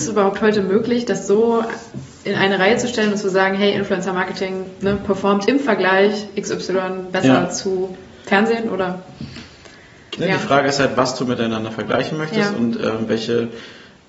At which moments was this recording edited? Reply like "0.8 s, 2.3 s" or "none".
10.2 s